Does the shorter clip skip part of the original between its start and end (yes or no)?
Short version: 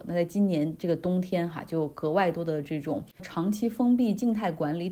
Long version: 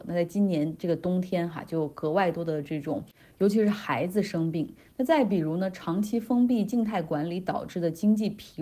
yes